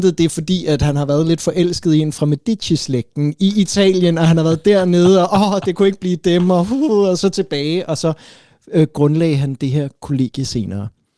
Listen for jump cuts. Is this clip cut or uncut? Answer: uncut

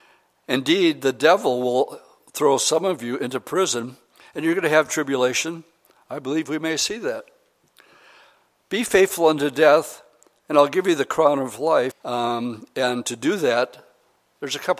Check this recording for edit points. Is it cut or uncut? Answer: cut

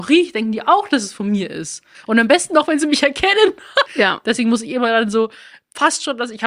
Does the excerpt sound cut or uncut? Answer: cut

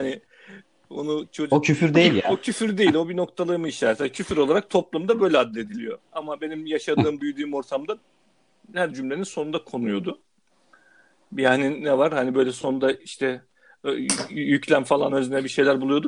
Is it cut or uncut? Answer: cut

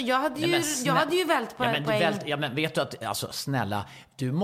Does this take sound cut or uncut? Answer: uncut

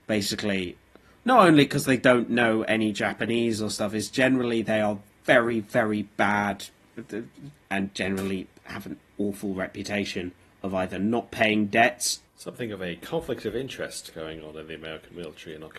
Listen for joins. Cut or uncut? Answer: cut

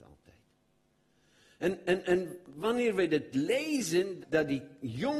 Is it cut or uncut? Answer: cut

